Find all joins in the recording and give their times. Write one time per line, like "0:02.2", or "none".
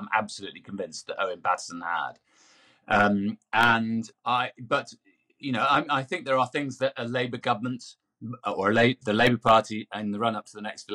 0:04.1